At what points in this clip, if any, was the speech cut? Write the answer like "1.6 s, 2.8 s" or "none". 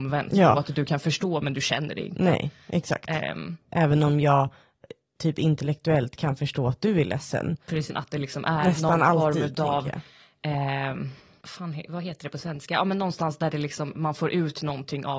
3.6 s, 7.9 s